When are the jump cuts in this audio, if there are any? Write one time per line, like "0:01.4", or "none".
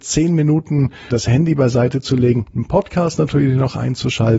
0:01.1